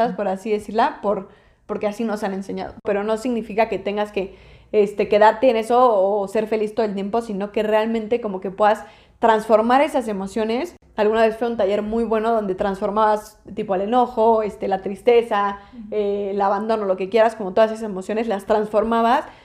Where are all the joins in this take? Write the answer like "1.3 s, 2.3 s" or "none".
2.8 s

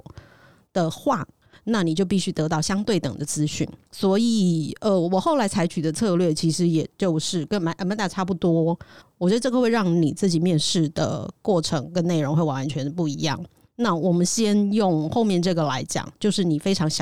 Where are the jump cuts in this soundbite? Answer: 9.0 s

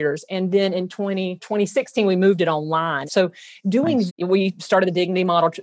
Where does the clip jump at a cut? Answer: 3.1 s, 4.1 s

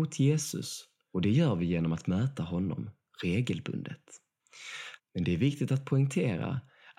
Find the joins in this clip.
5.0 s

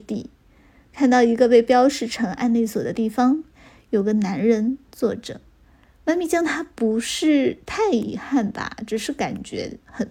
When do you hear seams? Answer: 5.8 s

